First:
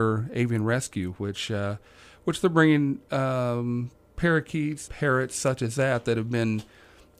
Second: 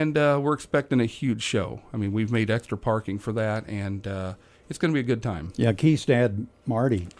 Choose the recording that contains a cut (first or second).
first